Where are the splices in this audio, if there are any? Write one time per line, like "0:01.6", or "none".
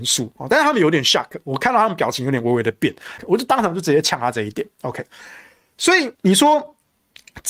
0:03.2
0:06.1